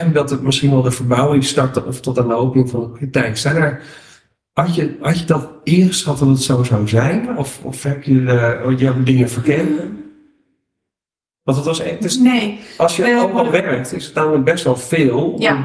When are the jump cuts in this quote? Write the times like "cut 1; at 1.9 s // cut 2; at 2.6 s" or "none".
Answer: none